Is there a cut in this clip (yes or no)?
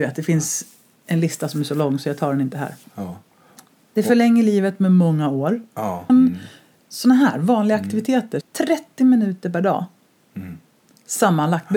yes